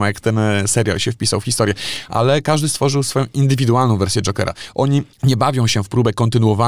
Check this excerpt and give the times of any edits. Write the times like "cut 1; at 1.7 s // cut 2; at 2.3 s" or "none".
cut 1; at 5.1 s